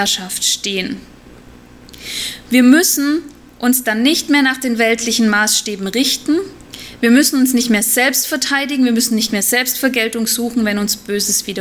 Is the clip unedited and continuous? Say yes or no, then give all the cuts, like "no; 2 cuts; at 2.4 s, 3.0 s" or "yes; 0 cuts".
yes; 0 cuts